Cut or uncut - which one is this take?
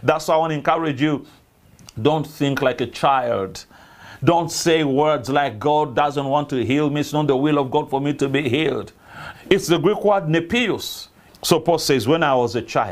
cut